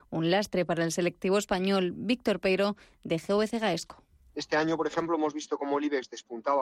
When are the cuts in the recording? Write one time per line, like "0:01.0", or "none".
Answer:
none